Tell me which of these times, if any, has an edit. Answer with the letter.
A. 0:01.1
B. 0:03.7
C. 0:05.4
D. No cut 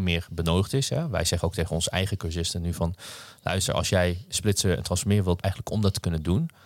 C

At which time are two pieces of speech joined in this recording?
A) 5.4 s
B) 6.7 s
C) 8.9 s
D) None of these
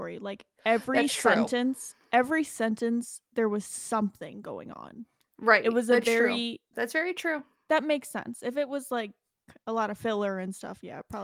B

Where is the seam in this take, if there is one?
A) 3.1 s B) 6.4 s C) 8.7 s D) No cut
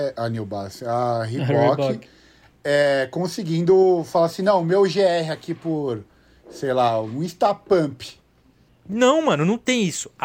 C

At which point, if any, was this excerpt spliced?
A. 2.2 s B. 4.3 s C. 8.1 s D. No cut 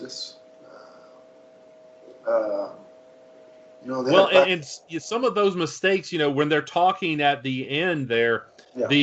D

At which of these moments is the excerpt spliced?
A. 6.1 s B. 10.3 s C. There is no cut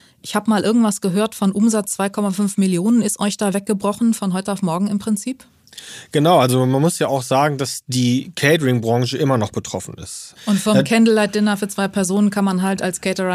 B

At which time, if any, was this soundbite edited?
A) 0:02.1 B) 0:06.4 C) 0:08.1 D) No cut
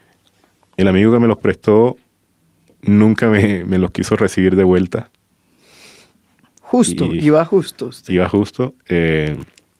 B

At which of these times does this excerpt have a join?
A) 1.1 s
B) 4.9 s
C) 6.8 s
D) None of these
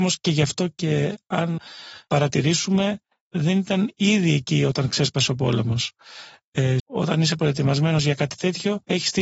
C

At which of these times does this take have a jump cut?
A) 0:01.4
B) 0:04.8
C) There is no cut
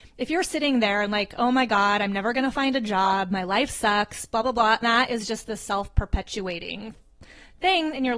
B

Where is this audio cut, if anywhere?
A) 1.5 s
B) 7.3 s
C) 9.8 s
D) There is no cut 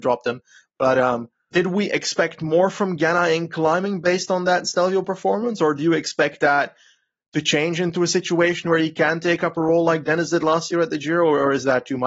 A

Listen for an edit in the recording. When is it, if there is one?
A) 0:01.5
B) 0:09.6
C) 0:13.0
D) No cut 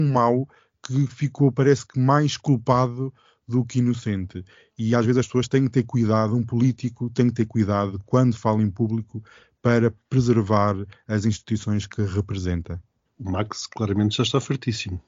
C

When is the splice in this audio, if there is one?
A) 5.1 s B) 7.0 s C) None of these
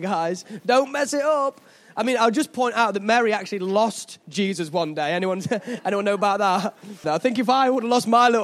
B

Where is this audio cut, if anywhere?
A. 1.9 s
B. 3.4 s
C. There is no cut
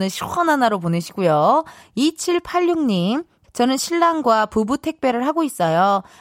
B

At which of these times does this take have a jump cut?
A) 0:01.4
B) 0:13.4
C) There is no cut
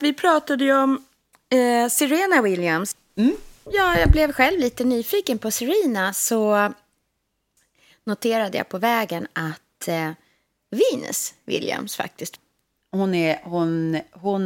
C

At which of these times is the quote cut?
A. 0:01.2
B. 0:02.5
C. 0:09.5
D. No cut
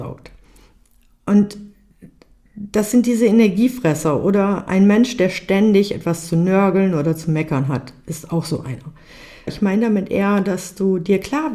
C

